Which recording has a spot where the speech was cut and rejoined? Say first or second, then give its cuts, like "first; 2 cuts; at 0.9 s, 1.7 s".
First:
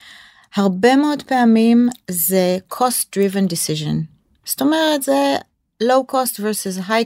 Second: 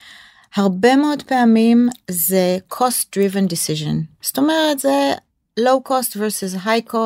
second; 1 cut; at 4.1 s